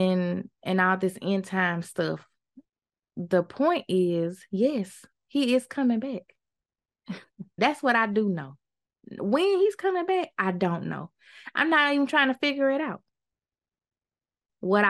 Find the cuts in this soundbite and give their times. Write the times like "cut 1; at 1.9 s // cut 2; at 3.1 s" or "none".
cut 1; at 7.6 s